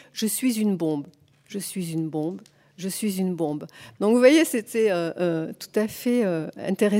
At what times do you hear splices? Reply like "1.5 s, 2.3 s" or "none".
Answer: 4.0 s